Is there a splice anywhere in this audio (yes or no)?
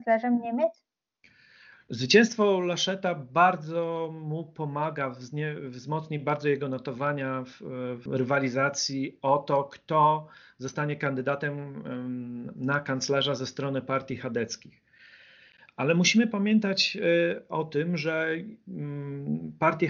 yes